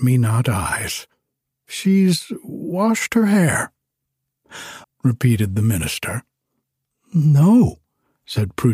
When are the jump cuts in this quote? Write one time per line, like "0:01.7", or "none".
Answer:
0:04.8